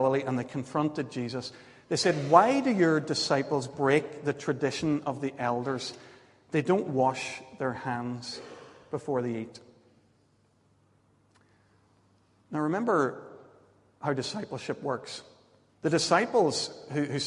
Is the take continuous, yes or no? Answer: no